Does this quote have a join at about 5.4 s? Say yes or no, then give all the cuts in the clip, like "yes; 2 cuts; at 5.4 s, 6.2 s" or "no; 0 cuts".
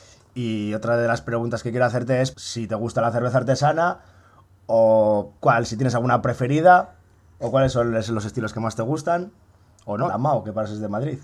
yes; 3 cuts; at 2.3 s, 5.4 s, 10.1 s